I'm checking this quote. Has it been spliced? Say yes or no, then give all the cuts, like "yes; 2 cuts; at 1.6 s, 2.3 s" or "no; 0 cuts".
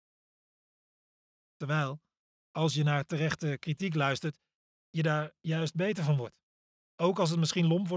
no; 0 cuts